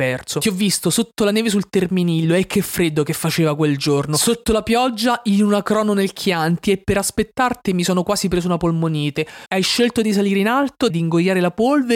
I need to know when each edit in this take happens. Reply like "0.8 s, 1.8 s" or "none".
9.5 s, 10.9 s